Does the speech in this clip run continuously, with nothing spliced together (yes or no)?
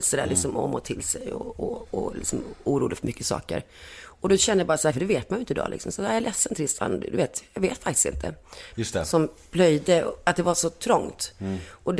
no